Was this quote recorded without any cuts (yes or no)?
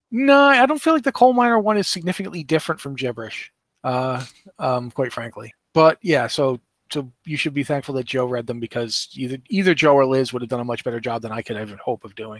yes